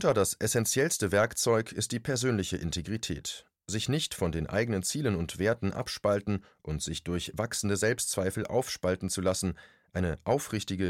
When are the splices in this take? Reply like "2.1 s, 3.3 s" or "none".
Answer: none